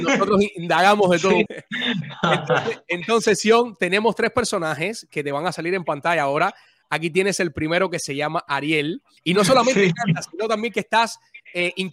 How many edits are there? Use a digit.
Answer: 2